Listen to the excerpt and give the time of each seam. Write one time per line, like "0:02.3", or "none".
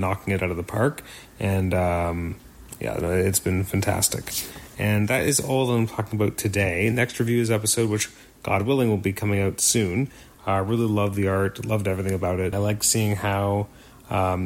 0:10.3
0:12.5